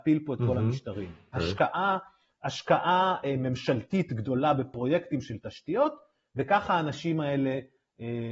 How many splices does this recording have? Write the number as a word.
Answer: one